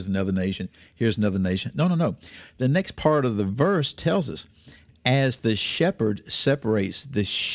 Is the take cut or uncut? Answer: uncut